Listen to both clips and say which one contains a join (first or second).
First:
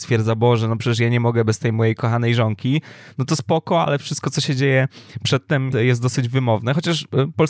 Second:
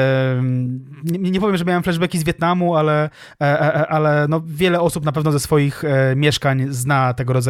first